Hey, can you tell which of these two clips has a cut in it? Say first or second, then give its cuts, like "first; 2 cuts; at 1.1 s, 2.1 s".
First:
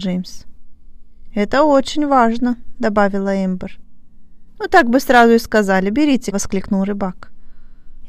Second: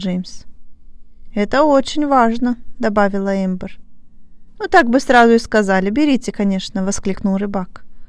first; 1 cut; at 6.3 s